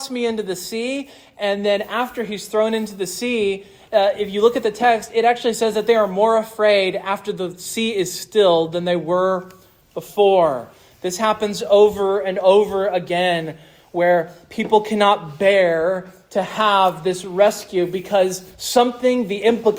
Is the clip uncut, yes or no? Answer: yes